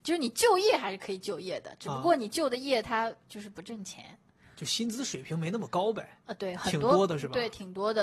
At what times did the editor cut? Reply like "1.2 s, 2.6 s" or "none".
6.2 s